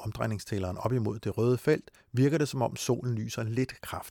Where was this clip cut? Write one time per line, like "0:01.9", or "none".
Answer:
none